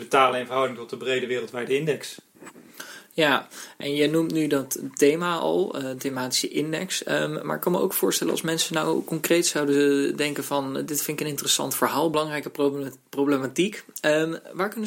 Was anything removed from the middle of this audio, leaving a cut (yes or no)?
no